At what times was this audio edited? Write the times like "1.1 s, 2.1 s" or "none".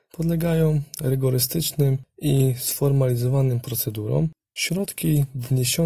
4.4 s